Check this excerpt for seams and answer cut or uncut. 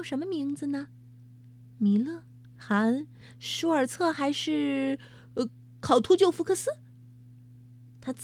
uncut